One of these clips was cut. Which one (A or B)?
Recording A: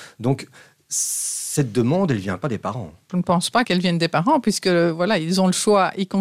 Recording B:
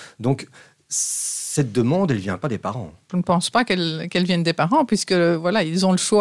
A